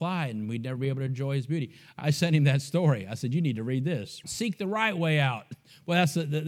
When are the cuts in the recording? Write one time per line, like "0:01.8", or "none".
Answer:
0:02.0
0:04.2